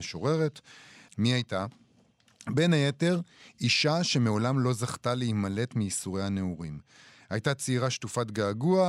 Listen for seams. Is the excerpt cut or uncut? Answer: cut